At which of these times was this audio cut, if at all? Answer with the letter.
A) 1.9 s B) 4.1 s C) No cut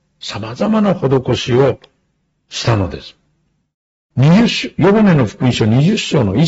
B